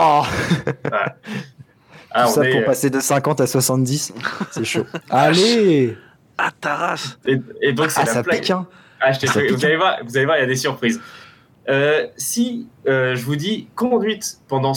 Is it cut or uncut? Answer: cut